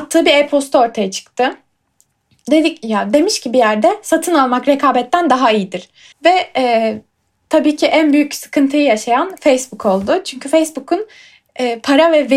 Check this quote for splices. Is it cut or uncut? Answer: cut